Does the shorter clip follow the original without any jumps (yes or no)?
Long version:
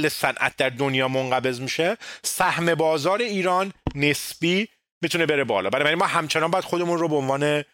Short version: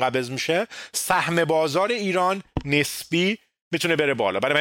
yes